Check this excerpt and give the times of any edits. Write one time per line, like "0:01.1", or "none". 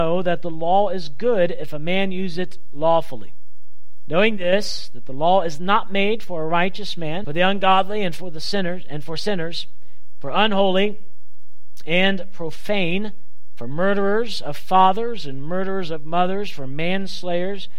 0:07.2